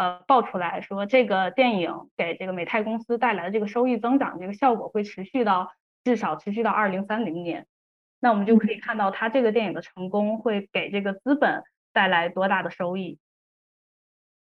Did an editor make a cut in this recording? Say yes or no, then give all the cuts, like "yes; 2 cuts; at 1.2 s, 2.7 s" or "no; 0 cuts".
no; 0 cuts